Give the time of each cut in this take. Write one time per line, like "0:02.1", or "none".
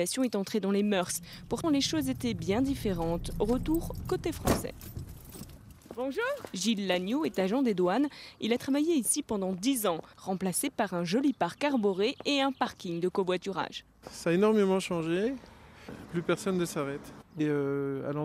0:01.6
0:10.1